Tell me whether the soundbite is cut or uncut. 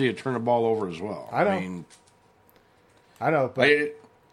uncut